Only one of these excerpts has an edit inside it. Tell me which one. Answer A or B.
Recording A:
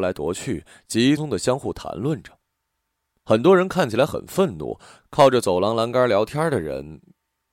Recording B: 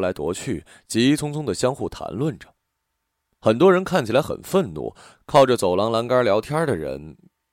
A